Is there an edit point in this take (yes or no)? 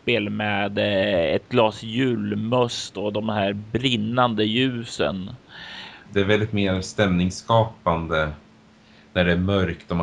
yes